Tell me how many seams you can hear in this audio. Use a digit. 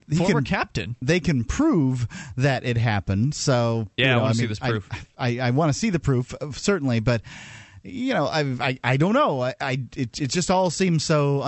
0